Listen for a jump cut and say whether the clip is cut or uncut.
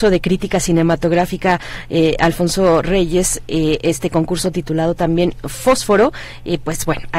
uncut